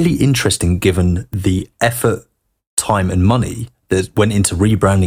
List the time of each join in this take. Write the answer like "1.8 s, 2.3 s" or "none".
none